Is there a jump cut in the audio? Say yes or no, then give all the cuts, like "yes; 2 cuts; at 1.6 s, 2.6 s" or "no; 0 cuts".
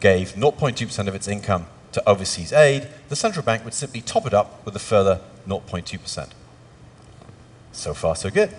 no; 0 cuts